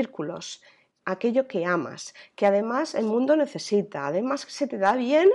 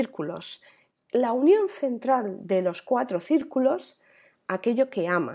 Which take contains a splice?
first; 1 cut; at 1.0 s

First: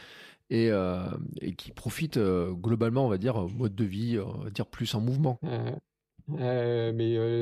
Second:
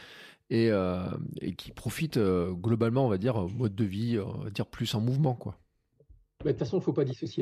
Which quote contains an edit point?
first; 1 cut; at 5.3 s

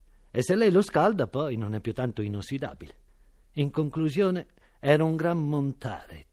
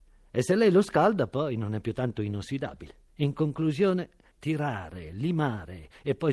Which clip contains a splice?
second; 2 cuts; at 3.1 s, 4.3 s

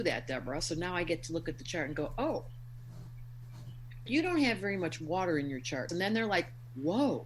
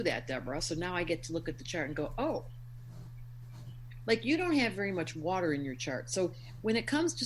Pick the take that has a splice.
first; 2 cuts; at 4.1 s, 5.9 s

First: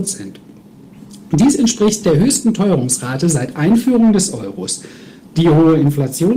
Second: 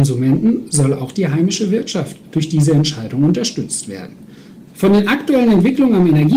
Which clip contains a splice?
second; 1 cut; at 4.7 s

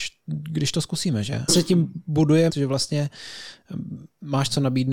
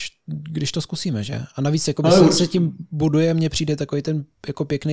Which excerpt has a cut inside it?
first; 2 cuts; at 1.5 s, 2.5 s

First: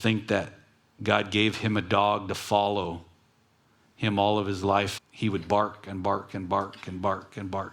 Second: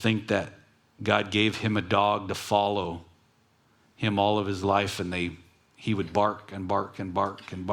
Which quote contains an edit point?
first; 1 cut; at 5.0 s

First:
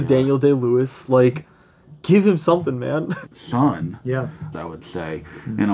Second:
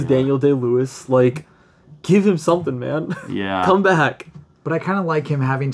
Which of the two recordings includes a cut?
first; 2 cuts; at 3.2 s, 4.5 s

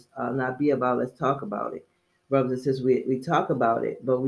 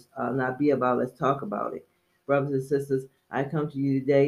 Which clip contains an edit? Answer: second; 1 cut; at 2.2 s

